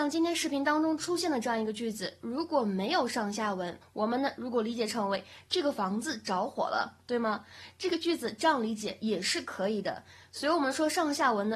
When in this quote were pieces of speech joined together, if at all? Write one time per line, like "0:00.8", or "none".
0:03.8